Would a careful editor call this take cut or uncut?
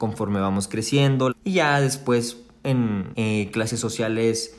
cut